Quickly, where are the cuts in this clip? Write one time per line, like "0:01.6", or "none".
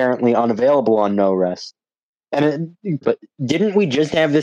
0:03.0